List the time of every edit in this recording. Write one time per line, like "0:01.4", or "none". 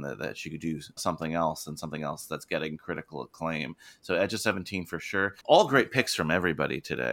0:01.0
0:05.4

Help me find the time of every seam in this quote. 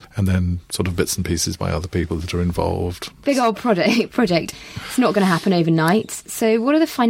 0:03.2

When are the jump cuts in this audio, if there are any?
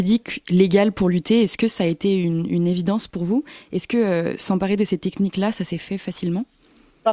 none

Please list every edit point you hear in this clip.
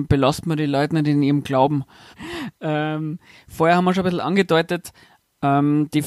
0:02.1

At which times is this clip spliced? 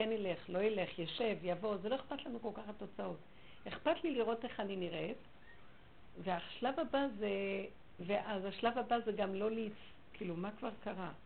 0:08.0
0:10.1

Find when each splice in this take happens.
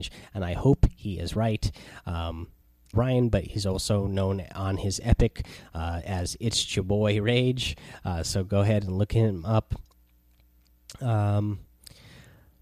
0:02.9

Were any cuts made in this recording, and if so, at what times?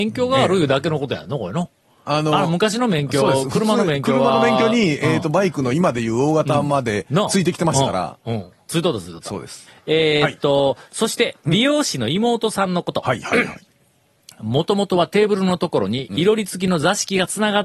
none

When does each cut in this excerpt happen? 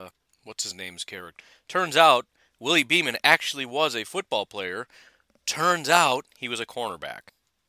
none

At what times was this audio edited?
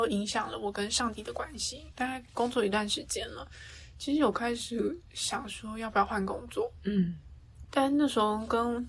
0:01.9

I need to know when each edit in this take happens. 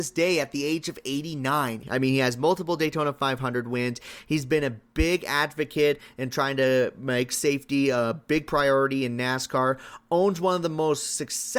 0:01.8

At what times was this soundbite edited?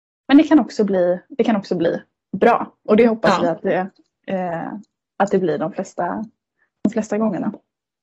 none

